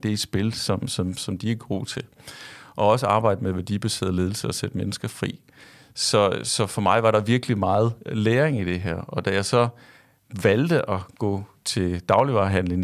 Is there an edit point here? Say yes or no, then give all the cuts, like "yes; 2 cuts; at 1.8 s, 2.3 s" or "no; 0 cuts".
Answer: no; 0 cuts